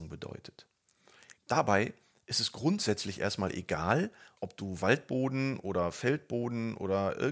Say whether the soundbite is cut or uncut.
cut